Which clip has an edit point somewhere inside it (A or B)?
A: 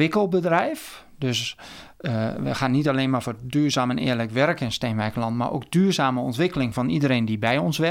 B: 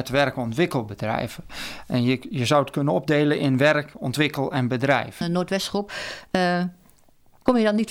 B